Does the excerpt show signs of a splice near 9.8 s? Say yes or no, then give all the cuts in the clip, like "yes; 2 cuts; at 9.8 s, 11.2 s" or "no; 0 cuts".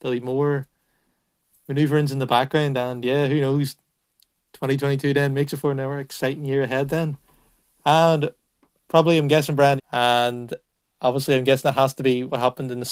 yes; 1 cut; at 9.8 s